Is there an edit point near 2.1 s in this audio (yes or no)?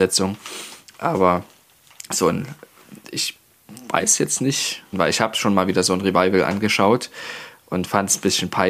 no